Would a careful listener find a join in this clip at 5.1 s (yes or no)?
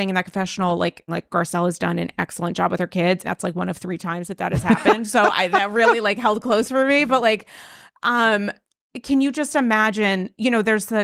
no